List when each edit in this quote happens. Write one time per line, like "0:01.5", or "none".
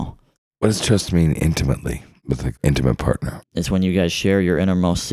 0:03.4